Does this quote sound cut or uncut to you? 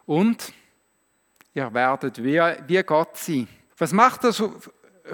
cut